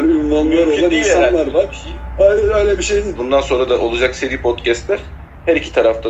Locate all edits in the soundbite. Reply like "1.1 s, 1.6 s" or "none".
3.2 s